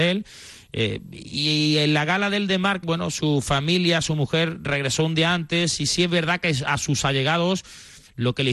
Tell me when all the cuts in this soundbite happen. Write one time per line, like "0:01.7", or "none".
0:02.8